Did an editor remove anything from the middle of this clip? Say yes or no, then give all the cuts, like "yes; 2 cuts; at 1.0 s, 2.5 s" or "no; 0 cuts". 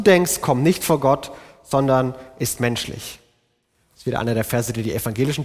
no; 0 cuts